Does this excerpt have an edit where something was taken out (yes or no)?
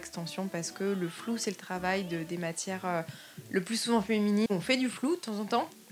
yes